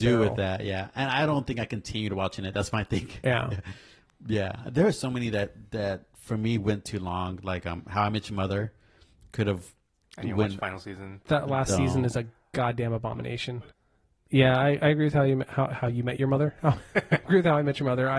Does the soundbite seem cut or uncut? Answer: uncut